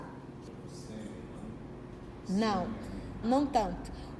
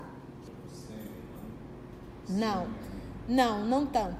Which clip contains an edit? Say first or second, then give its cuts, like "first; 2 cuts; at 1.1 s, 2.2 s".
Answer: first; 1 cut; at 3.2 s